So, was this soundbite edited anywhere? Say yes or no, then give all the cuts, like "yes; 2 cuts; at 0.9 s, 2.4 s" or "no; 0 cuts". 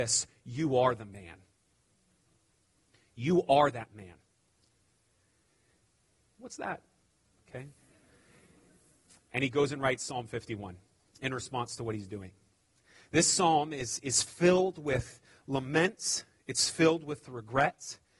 yes; 1 cut; at 6.2 s